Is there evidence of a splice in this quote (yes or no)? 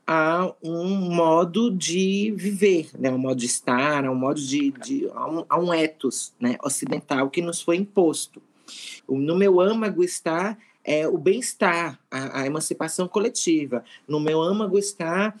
yes